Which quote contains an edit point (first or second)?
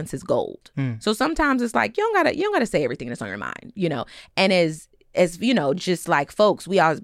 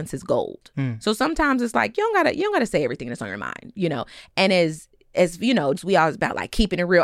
second